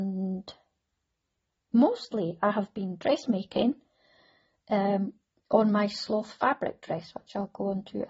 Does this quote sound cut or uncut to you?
uncut